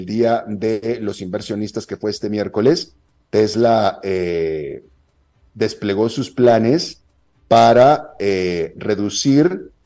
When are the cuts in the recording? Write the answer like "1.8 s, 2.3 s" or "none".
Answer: none